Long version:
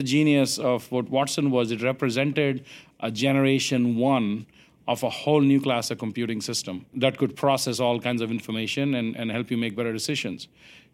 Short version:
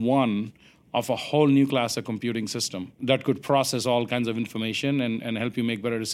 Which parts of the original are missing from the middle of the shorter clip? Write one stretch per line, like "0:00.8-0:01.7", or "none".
none